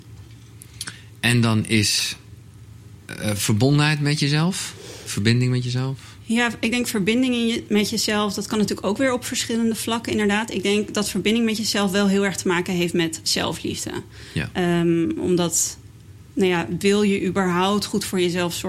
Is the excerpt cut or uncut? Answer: uncut